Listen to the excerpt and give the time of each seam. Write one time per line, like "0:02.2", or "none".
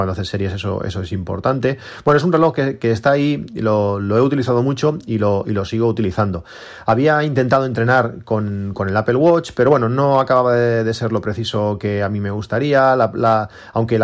none